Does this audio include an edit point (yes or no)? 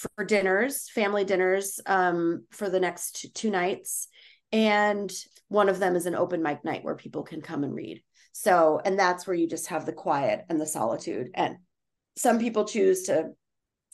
no